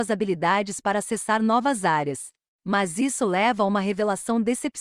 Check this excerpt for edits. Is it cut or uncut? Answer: uncut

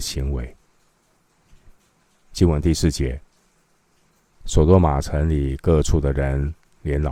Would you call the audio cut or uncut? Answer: cut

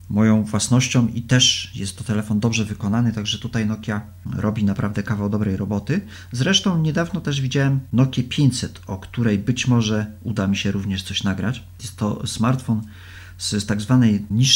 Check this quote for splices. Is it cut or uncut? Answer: uncut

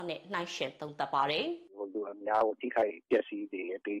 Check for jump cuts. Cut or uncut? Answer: uncut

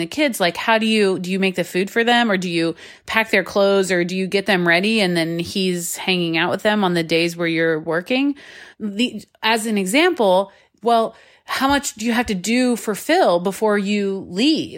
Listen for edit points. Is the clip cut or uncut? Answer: cut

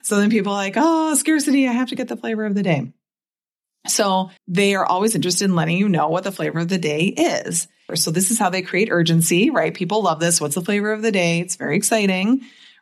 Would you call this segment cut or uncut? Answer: cut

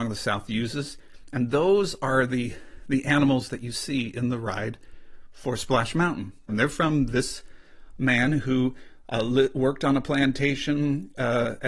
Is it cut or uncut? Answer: cut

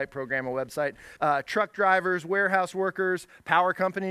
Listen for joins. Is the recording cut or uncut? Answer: cut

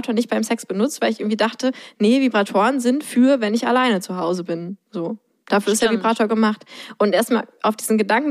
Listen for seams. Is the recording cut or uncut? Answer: uncut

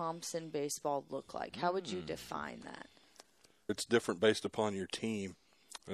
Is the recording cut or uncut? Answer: cut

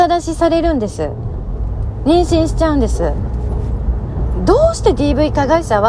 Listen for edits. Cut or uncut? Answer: uncut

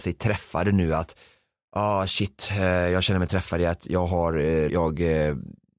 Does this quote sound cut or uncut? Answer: cut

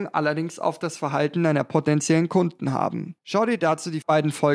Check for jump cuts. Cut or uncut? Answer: uncut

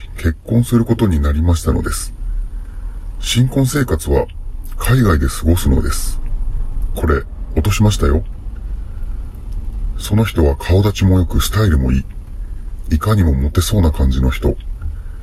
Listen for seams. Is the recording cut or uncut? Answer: cut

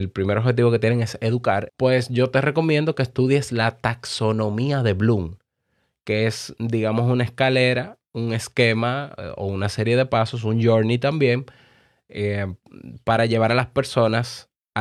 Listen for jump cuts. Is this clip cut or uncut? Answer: cut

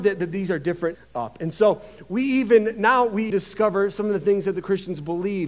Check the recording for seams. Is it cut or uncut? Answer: cut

